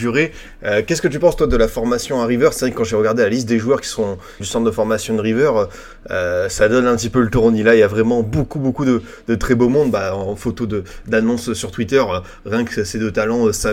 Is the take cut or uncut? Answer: cut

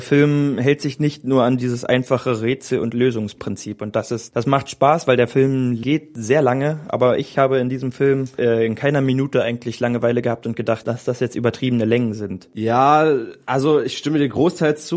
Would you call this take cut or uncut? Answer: uncut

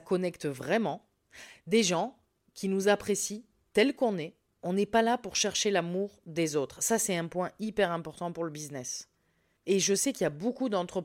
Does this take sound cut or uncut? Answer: cut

